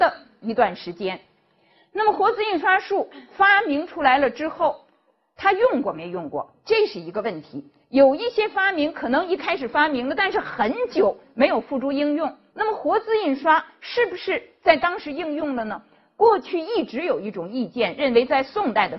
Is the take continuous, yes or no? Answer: no